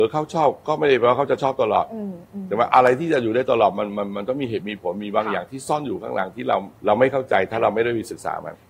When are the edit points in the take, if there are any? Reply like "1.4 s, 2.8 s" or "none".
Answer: 6.8 s